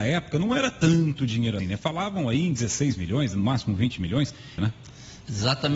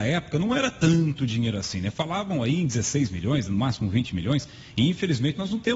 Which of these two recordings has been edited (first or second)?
first